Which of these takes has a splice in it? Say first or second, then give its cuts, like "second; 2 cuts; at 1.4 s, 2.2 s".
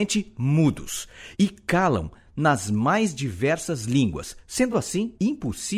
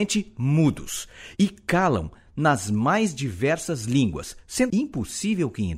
second; 1 cut; at 4.7 s